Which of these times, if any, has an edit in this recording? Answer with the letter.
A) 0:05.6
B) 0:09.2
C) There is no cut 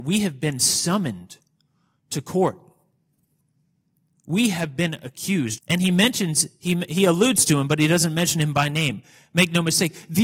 A